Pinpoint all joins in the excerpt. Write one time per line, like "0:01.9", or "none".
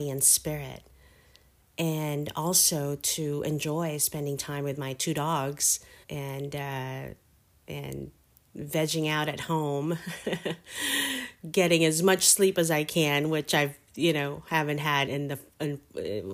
0:06.0
0:15.1